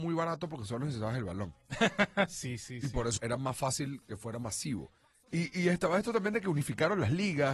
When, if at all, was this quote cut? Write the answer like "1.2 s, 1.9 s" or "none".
3.2 s